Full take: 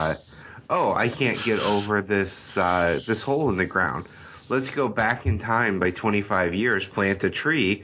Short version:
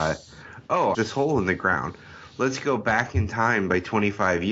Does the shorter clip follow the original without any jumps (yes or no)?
no